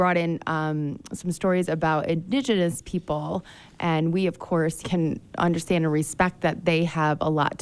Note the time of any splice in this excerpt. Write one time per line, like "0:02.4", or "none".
0:04.8

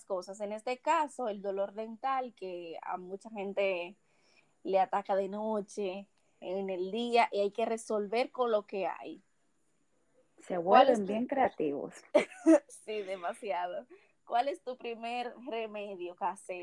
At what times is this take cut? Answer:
none

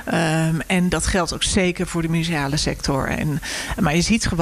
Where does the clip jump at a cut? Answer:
none

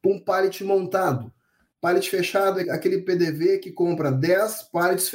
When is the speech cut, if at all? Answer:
0:02.6

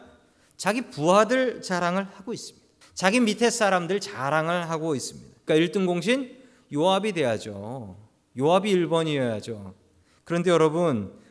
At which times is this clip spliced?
0:02.8
0:05.5

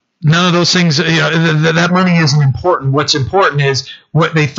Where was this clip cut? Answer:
none

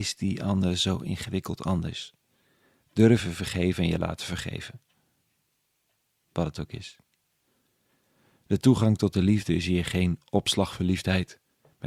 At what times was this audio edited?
none

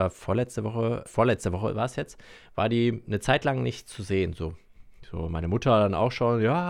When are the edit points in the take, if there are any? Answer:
0:01.1

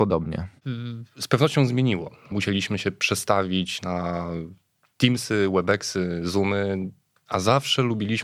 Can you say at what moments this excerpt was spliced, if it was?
0:02.3

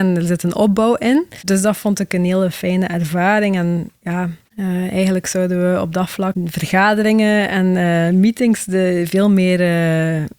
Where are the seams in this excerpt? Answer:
none

